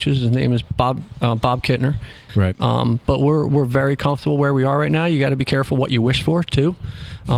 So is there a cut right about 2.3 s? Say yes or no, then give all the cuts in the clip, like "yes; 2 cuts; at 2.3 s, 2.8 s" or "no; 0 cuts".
yes; 1 cut; at 2.3 s